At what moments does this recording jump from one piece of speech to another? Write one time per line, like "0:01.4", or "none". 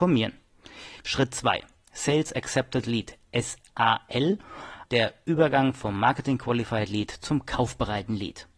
0:01.0
0:04.8